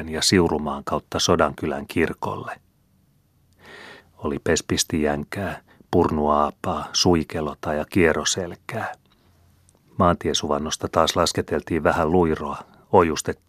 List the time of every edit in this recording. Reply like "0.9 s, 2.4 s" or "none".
4.0 s